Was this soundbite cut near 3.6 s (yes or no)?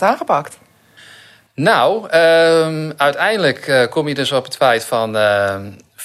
no